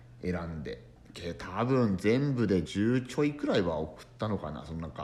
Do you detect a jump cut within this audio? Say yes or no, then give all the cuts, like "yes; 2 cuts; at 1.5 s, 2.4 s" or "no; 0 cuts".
yes; 1 cut; at 2.6 s